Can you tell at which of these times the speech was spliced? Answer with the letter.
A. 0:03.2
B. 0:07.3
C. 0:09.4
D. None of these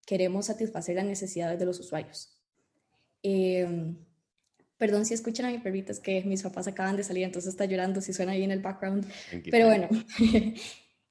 A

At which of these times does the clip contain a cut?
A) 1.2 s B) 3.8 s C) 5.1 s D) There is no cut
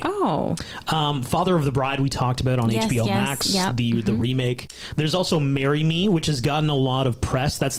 D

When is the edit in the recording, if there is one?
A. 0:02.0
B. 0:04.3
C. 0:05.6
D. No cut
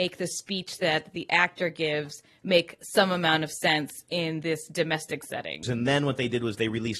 C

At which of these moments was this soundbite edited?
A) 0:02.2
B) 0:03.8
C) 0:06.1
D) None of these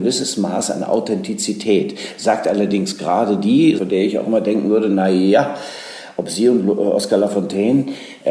B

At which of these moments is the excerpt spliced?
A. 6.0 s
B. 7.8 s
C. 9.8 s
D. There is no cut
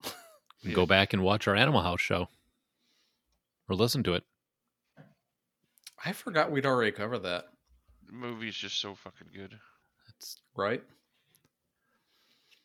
D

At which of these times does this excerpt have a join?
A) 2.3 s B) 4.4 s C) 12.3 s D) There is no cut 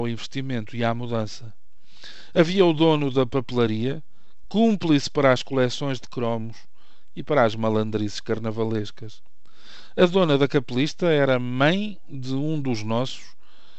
B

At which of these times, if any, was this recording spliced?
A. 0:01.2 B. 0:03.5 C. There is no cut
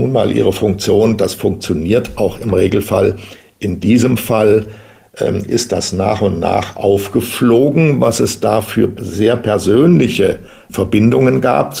C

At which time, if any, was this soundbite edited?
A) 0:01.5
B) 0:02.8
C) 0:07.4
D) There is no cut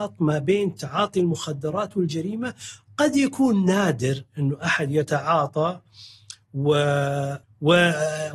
C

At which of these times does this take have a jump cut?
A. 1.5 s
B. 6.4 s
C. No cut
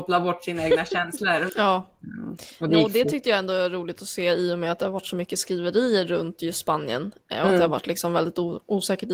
A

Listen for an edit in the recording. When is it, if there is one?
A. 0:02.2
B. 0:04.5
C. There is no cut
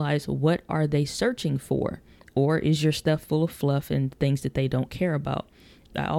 A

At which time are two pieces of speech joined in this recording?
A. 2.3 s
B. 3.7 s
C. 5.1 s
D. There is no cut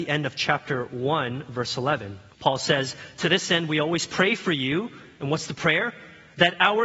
A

